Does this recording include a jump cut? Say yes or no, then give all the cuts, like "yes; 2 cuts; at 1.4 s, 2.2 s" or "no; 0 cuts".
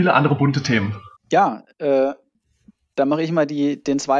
yes; 1 cut; at 1.2 s